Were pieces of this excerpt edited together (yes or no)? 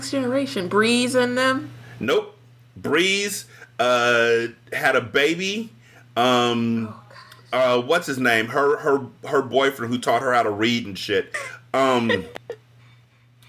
no